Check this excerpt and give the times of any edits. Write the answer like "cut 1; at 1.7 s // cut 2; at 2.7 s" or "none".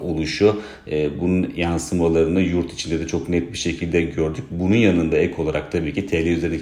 none